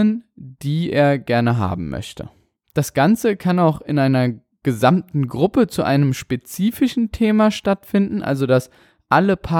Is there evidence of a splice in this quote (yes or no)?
no